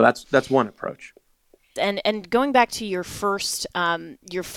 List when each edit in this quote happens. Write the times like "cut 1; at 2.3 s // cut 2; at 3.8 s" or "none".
cut 1; at 1.8 s